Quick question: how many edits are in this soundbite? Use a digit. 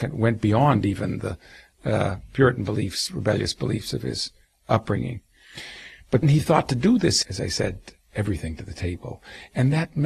2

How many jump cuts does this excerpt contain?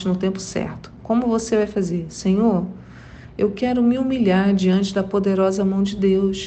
0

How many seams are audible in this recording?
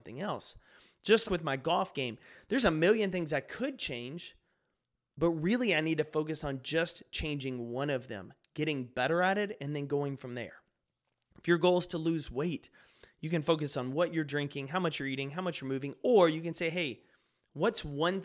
1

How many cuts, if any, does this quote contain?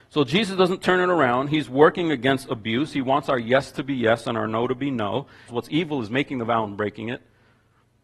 1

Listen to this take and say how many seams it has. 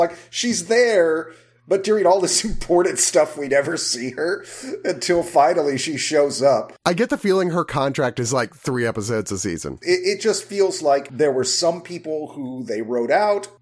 1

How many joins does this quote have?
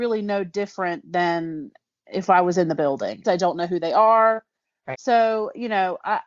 2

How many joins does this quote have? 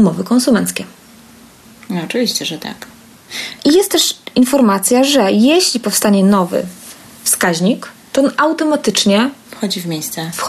1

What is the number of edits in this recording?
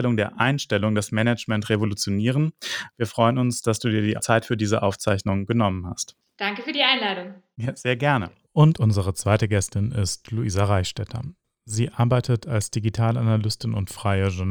0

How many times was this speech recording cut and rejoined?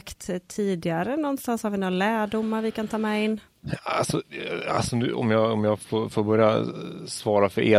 0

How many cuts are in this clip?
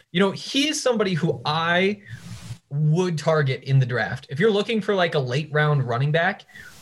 0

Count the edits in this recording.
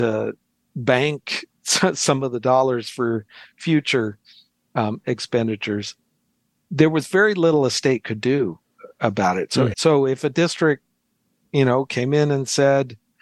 1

